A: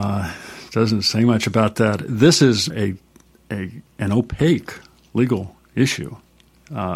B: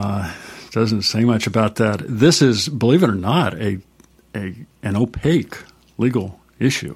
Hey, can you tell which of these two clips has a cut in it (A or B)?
A